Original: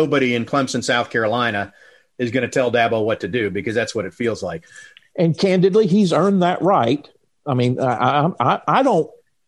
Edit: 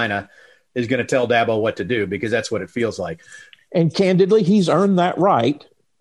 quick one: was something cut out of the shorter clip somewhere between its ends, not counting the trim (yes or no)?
no